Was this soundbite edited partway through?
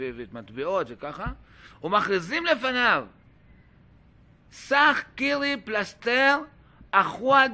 yes; 1 cut; at 4.5 s

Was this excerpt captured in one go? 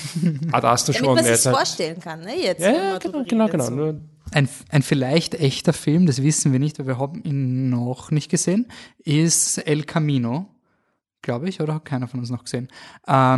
yes; 0 cuts

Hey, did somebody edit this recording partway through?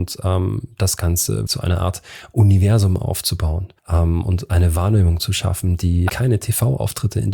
yes; 3 cuts; at 1.5 s, 3.8 s, 6.1 s

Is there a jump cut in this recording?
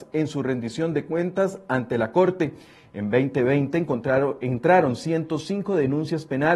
no; 0 cuts

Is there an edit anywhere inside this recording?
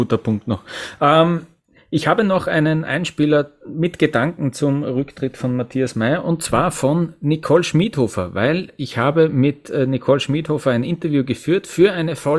no; 0 cuts

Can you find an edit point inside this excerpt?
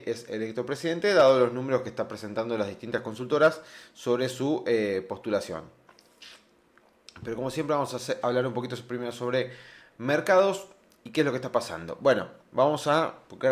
no; 0 cuts

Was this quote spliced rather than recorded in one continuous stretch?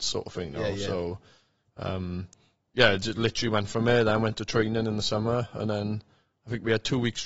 no; 0 cuts

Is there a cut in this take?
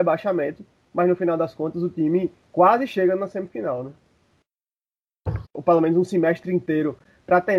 yes; 1 cut; at 5.4 s

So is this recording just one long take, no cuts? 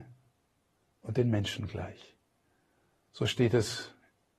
yes; 0 cuts

